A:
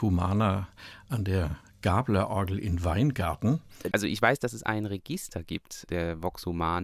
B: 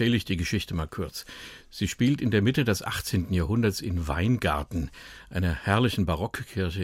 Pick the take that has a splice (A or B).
A